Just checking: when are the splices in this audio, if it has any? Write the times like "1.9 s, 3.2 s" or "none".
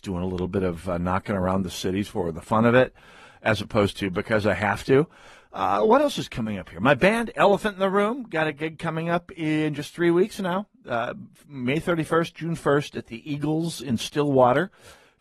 none